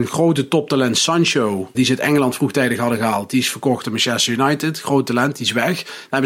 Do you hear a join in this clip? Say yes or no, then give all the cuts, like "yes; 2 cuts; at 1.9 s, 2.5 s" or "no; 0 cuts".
yes; 1 cut; at 1.7 s